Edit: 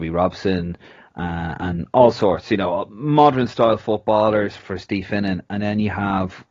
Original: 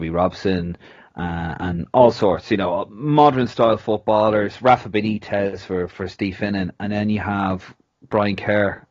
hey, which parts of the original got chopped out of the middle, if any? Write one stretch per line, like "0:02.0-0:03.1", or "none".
0:04.6-0:05.9